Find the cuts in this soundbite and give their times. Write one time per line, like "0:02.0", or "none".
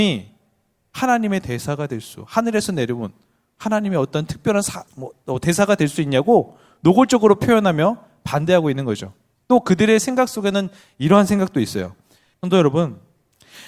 0:04.9
0:09.3
0:12.3